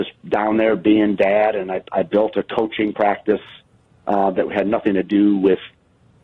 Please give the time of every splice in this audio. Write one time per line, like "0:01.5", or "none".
none